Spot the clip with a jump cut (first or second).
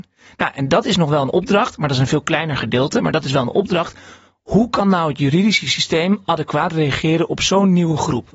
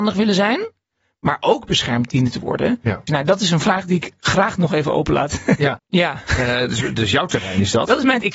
second